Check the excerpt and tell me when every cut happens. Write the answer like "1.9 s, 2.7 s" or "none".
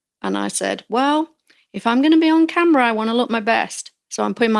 none